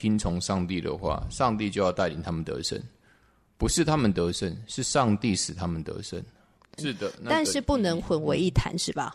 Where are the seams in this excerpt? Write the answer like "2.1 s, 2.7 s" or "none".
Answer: 6.8 s